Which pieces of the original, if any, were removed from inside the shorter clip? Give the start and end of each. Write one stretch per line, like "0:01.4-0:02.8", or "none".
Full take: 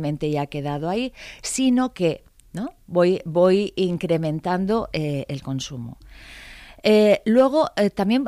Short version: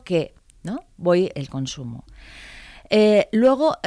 0:03.2-0:05.3